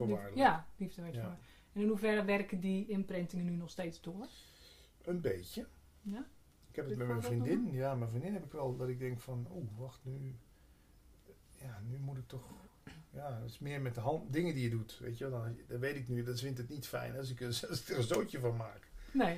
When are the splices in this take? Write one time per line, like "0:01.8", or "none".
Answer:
none